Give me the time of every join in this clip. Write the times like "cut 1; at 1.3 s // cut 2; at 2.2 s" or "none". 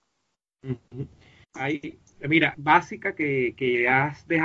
cut 1; at 1.4 s // cut 2; at 2.5 s